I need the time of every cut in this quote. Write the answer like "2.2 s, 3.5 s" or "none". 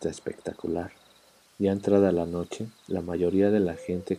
1.4 s, 2.8 s